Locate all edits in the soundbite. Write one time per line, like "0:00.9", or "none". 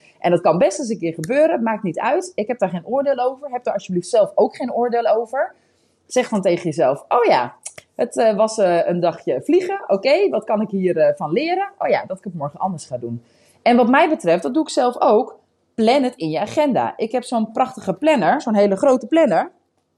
none